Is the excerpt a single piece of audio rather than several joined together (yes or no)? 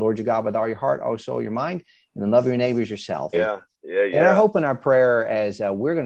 no